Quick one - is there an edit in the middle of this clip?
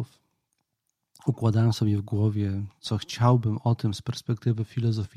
no; 0 cuts

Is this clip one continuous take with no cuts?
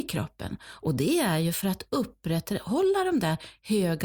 yes; 0 cuts

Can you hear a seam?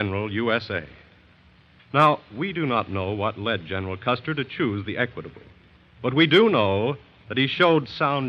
yes; 1 cut; at 1.8 s

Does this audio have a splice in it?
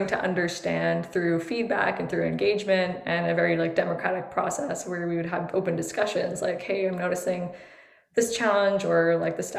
no; 0 cuts

